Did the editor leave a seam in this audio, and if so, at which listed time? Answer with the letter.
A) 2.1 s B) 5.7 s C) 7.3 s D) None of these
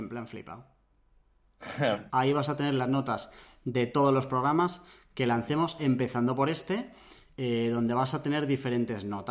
A